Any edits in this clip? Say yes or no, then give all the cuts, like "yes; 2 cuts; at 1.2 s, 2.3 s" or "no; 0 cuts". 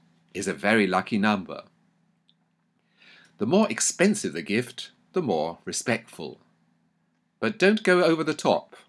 no; 0 cuts